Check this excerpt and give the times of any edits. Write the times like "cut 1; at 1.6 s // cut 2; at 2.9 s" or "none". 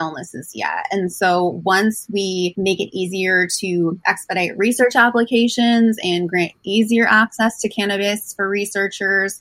none